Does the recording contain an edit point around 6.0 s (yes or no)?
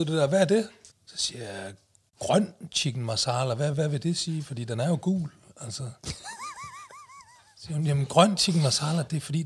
no